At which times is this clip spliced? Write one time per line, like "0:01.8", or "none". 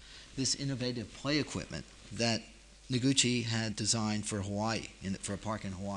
0:03.7